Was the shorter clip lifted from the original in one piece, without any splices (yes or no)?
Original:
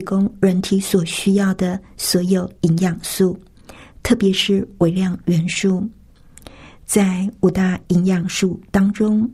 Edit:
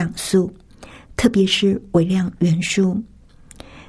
yes